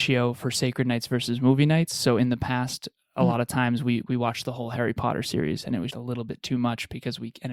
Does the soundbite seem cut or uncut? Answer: cut